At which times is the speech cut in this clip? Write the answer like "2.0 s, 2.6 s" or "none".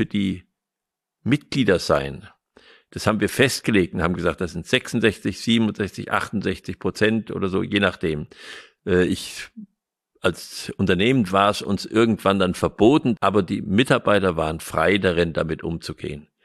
8.8 s, 13.2 s